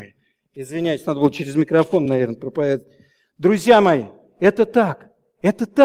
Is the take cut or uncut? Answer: uncut